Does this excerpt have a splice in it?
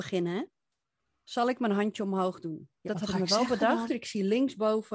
yes; 2 cuts; at 2.8 s, 3.9 s

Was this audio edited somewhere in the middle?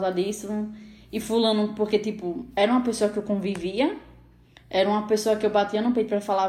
no; 0 cuts

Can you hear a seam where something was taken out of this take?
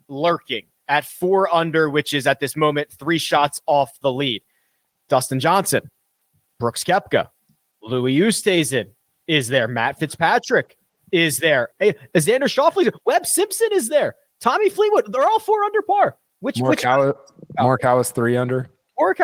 yes; 1 cut; at 11.7 s

